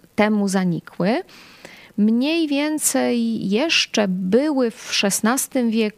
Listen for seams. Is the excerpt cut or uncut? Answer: uncut